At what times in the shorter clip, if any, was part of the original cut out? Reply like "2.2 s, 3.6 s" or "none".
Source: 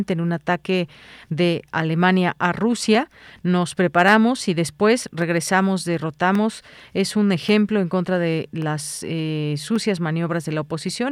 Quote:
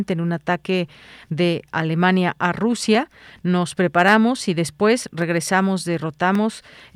none